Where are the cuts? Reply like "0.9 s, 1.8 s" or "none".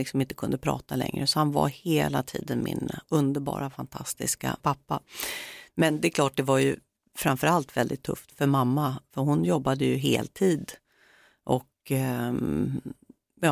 none